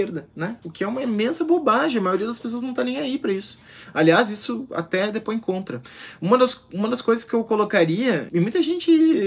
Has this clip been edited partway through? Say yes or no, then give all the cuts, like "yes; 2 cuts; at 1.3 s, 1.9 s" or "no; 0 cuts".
yes; 1 cut; at 8.3 s